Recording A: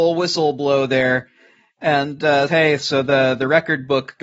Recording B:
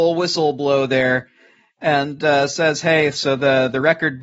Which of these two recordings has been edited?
A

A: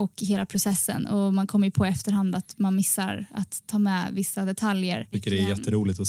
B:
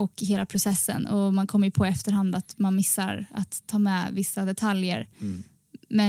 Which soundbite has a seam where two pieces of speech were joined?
A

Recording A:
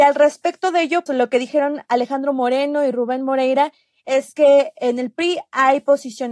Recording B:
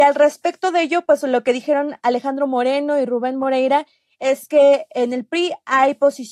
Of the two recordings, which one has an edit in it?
A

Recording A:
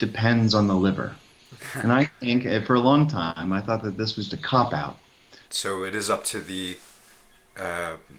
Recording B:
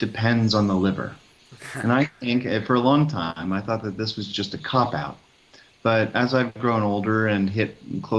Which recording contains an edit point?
A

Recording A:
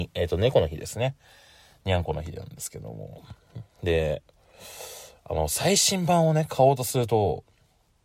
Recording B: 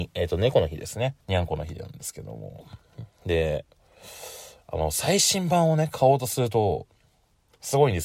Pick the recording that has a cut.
B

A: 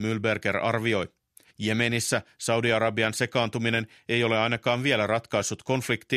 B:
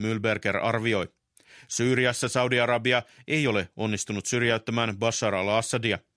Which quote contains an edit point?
A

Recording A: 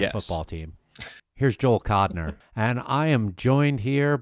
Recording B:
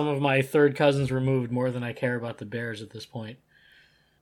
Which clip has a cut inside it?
A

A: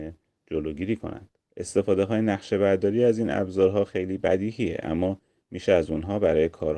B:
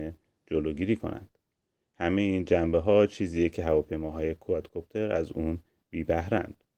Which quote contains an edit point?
A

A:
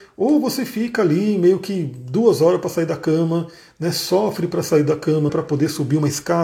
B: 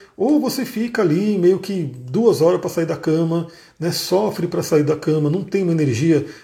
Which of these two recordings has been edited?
A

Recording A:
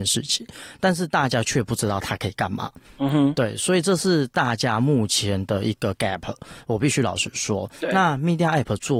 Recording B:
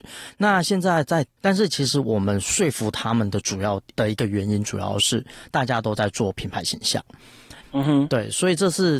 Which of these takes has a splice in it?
B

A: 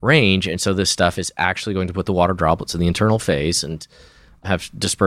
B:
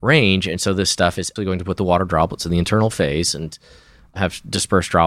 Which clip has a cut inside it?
B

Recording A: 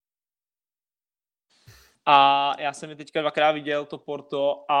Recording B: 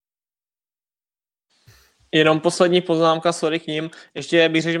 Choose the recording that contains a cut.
A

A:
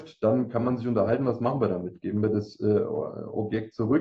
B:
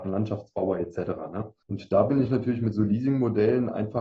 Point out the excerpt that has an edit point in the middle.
B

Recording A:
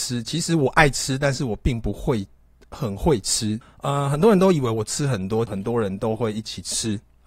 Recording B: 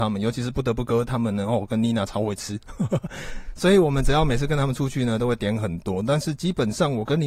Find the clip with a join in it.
A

